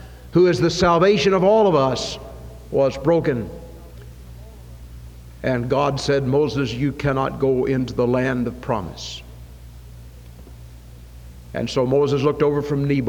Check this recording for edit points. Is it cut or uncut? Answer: uncut